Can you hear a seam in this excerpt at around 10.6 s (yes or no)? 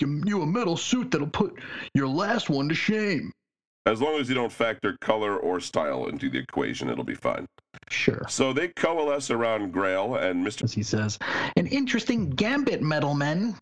yes